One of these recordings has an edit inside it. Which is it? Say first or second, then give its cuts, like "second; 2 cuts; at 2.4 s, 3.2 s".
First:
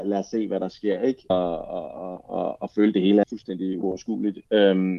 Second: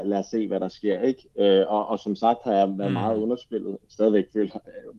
first; 2 cuts; at 1.3 s, 3.2 s